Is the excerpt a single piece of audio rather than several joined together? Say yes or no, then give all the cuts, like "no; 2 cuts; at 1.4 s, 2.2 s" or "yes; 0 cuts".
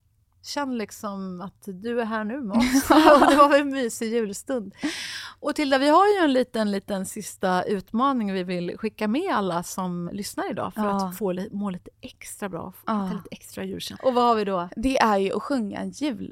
no; 2 cuts; at 10.1 s, 13.9 s